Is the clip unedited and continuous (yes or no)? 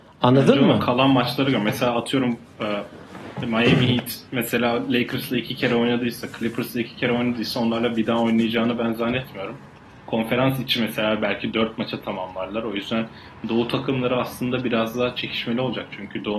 yes